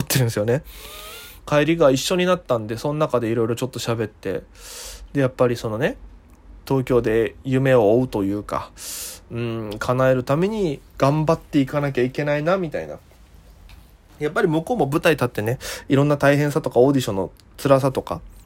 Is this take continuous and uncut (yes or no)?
no